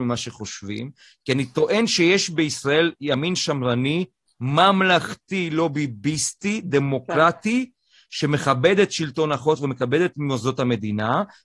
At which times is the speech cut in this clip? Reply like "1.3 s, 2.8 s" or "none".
none